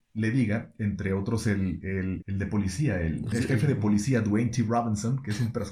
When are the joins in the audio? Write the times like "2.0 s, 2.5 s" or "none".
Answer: 2.2 s, 3.3 s